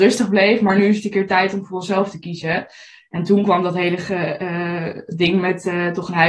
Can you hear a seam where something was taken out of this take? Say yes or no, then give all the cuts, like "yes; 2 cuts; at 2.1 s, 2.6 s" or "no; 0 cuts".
no; 0 cuts